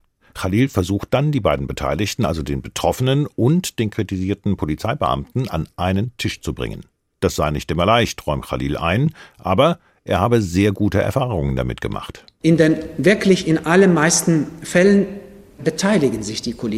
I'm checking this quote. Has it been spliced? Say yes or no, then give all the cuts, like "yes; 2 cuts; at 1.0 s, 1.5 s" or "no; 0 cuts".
no; 0 cuts